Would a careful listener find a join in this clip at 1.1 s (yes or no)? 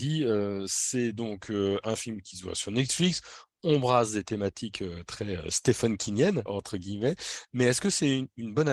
no